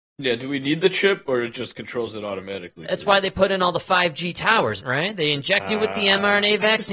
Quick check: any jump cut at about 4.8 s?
yes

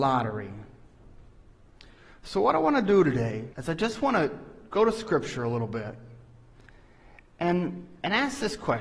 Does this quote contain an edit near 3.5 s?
yes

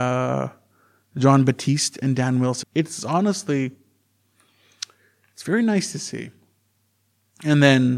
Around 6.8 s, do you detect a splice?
no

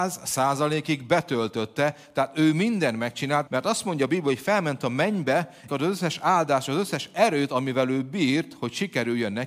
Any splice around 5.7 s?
yes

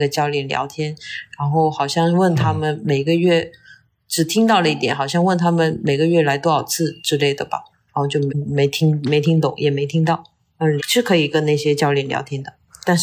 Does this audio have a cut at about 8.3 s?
yes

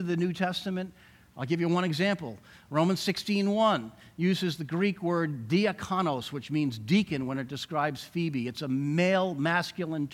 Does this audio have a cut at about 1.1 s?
no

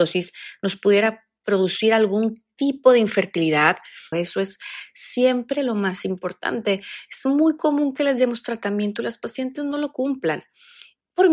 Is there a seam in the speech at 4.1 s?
yes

